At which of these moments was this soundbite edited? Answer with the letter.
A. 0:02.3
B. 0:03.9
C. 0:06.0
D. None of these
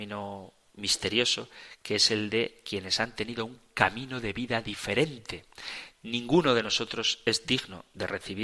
D